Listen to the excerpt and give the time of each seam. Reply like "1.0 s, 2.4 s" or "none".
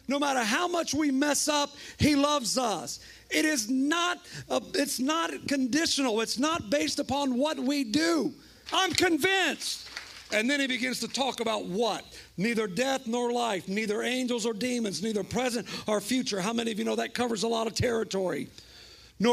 8.7 s